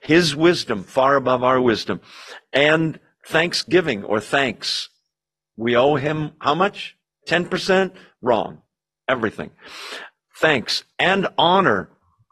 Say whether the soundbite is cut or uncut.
cut